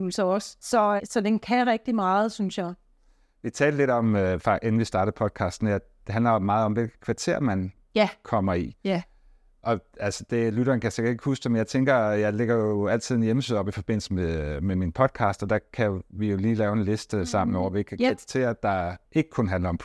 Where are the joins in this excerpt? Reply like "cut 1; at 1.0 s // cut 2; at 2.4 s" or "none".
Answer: cut 1; at 1.0 s